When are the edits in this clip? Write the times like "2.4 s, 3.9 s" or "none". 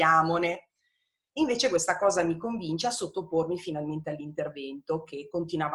none